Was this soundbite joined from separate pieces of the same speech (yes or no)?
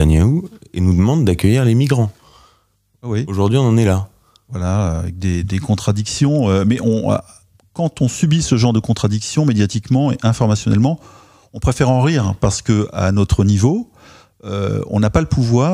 no